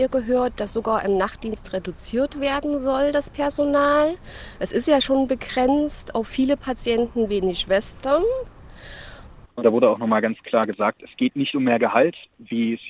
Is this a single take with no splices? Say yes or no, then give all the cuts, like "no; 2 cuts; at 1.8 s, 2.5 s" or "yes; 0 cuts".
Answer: no; 1 cut; at 9.5 s